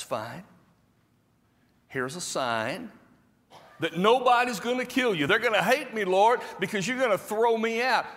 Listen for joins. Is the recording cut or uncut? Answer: uncut